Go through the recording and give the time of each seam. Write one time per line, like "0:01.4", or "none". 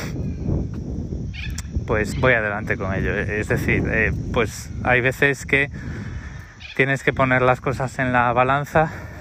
0:02.1